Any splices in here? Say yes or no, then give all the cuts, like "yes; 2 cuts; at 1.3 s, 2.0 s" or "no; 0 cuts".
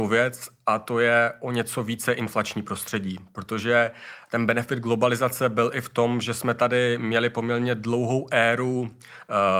no; 0 cuts